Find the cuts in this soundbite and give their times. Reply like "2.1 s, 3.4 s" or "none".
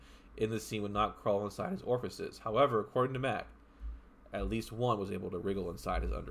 none